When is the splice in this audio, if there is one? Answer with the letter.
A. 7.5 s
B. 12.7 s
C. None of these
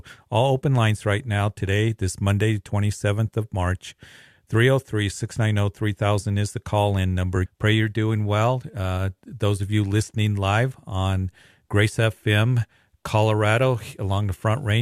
A